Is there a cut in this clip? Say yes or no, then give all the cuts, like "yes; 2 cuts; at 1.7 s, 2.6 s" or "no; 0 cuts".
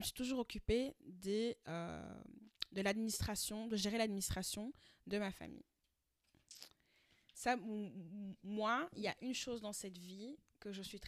no; 0 cuts